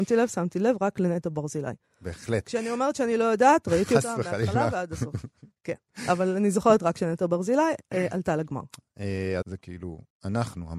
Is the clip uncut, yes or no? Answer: no